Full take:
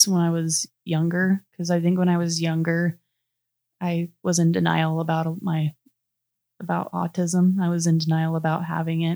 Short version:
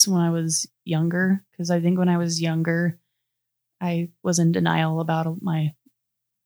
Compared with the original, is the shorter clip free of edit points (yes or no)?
yes